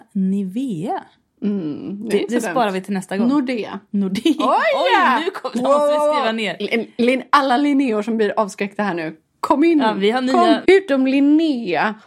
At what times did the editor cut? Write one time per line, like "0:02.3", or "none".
0:10.6